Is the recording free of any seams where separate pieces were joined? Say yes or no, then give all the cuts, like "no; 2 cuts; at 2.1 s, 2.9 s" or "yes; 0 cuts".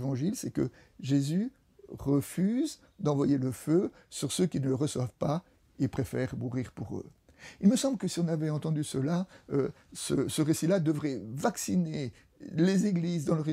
yes; 0 cuts